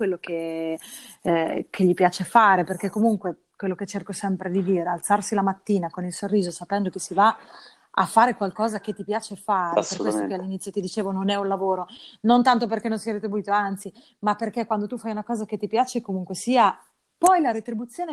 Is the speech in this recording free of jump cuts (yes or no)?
yes